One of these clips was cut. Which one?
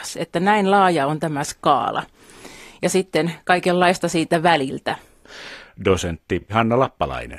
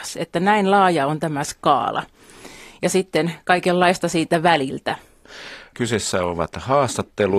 first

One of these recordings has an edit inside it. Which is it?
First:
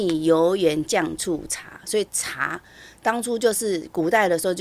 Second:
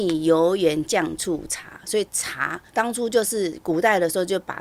second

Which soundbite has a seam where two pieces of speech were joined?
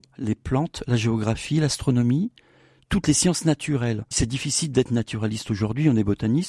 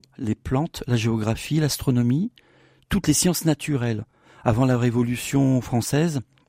first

